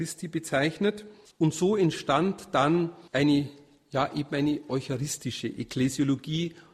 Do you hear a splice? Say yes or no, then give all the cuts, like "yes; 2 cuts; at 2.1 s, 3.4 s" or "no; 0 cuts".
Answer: yes; 2 cuts; at 1.3 s, 3.1 s